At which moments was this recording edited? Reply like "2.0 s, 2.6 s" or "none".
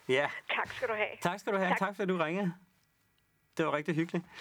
none

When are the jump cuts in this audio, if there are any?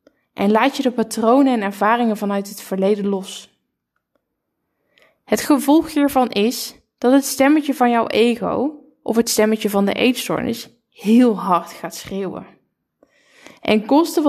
none

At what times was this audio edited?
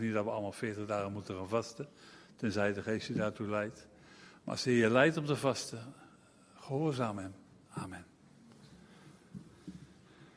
7.7 s

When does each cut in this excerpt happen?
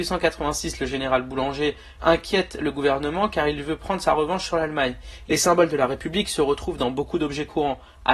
2.0 s, 5.3 s

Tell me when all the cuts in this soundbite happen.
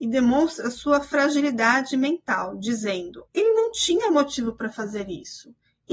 3.3 s

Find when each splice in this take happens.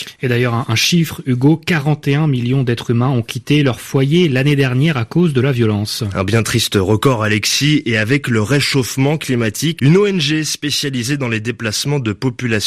9.8 s

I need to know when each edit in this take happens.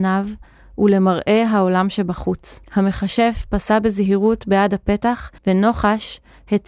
2.6 s, 5.4 s

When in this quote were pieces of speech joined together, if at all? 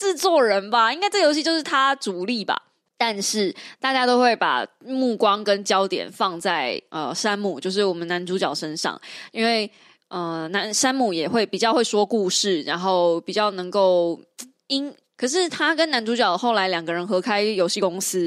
2.9 s, 15.2 s

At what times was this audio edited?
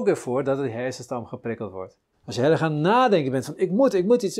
2.1 s

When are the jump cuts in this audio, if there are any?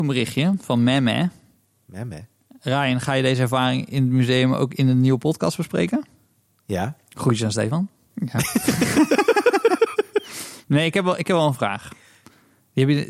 8.1 s

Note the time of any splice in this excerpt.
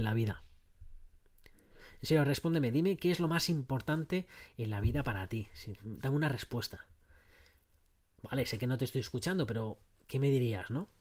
none

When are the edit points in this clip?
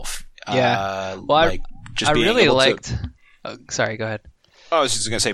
none

